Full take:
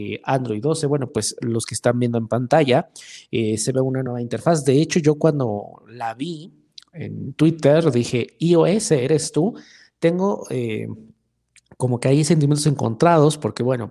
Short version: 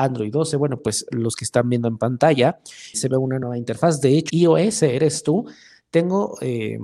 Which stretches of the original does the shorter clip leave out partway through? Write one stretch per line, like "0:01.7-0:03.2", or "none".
0:03.2-0:03.6
0:04.9-0:08.4